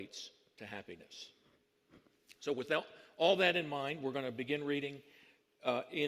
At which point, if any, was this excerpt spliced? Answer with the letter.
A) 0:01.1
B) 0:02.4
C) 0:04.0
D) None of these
D